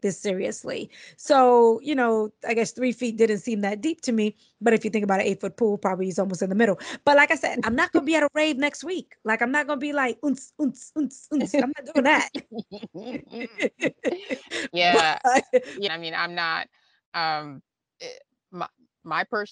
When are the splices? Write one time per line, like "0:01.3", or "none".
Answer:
0:15.9